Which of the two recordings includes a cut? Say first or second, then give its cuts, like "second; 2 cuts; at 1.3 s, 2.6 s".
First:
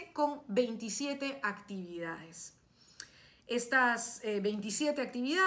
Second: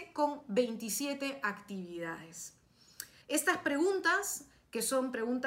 second; 1 cut; at 3.2 s